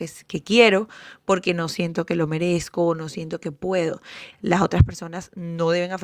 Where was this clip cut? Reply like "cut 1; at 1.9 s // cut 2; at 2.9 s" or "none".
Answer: cut 1; at 4.3 s